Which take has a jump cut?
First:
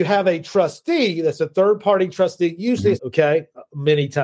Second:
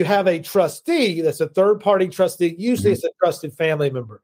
first; 1 cut; at 3.0 s

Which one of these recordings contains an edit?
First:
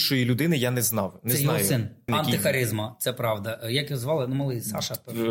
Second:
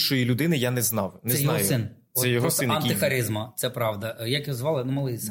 first; 1 cut; at 2.1 s

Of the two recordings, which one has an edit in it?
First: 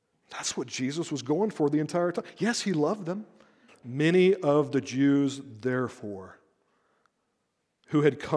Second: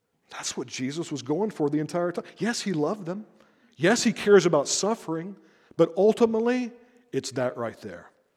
first; 1 cut; at 3.7 s

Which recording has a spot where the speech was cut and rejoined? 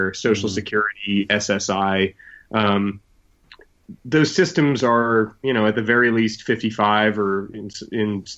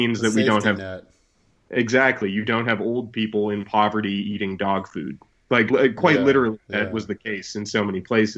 second; 1 cut; at 5.7 s

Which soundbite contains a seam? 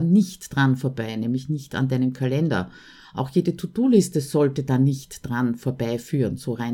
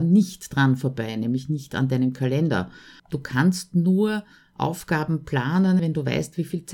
second; 2 cuts; at 3.0 s, 5.8 s

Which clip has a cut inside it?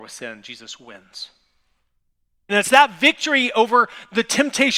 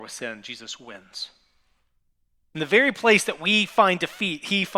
first; 1 cut; at 2.5 s

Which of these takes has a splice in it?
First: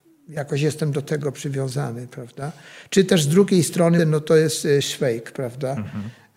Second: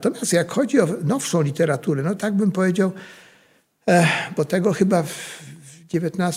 first; 1 cut; at 4.0 s

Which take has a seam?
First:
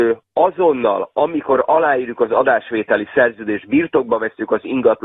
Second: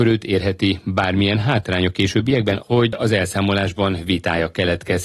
second; 1 cut; at 2.6 s

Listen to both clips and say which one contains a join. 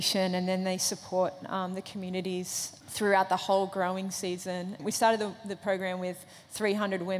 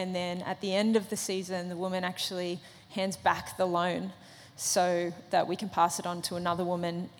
first; 2 cuts; at 2.8 s, 4.8 s

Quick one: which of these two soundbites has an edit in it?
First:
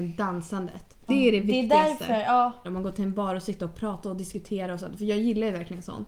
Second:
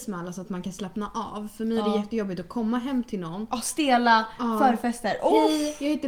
first; 2 cuts; at 1.1 s, 2.6 s

